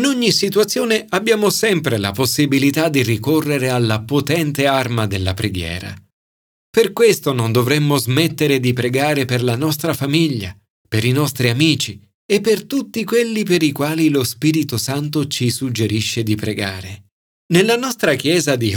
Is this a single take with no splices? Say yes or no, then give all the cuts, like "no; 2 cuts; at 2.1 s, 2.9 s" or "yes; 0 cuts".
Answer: no; 1 cut; at 17.4 s